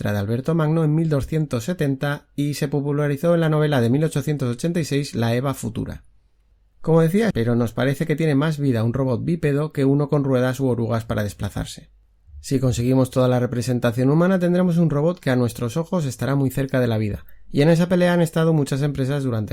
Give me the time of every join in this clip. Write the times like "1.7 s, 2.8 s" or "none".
7.3 s